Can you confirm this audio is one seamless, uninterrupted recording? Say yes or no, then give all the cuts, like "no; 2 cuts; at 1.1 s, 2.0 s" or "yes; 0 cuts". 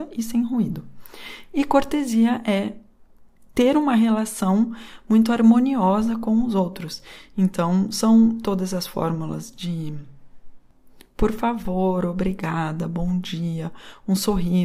yes; 0 cuts